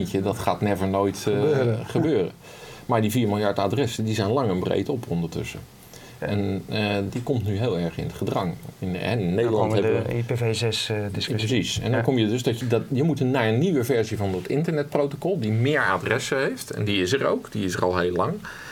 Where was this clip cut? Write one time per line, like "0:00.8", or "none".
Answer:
0:07.1
0:12.6